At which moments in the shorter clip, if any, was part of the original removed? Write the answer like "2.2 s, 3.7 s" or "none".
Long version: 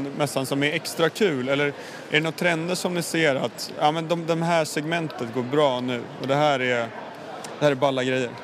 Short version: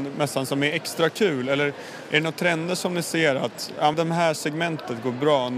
3.9 s

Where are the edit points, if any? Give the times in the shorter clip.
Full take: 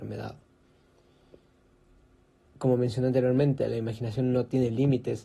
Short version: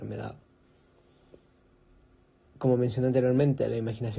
none

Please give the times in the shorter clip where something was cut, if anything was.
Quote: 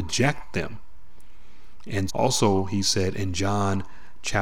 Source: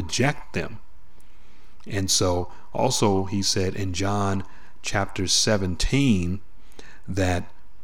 2.1 s

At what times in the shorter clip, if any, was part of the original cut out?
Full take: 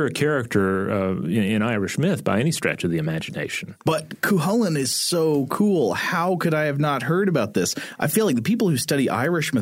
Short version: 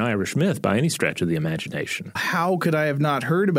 2.2 s

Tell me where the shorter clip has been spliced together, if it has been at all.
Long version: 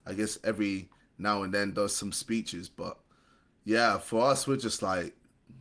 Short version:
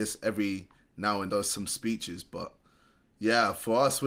1.3 s

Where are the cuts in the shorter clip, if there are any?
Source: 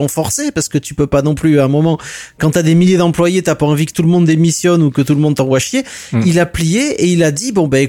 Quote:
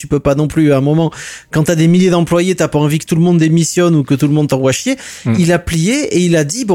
none

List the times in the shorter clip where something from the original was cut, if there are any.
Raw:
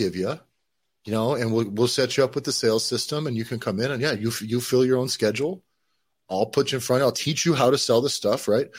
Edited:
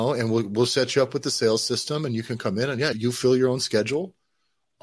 2.9 s

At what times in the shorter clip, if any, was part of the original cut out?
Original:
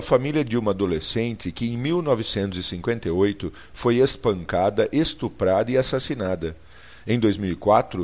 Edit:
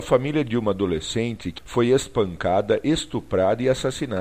1.6 s

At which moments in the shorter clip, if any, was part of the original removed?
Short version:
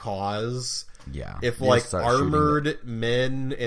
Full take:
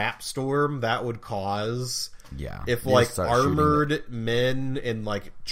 none

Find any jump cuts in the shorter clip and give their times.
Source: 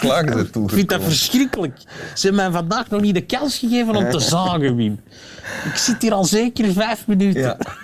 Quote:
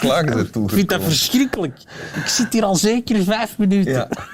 2.1 s

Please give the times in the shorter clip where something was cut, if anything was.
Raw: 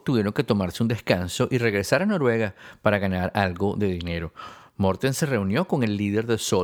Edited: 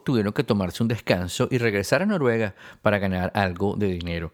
none

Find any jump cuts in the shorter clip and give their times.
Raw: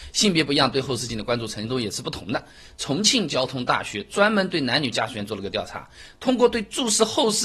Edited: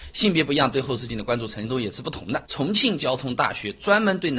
2.4 s

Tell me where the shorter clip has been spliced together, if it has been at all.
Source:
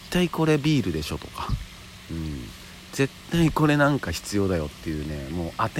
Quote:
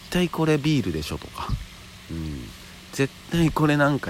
none

